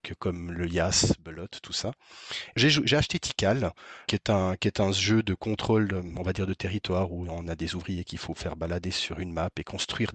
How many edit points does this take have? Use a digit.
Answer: 2